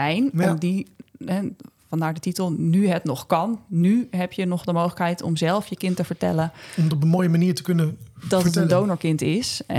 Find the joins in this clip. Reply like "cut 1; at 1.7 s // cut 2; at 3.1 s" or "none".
none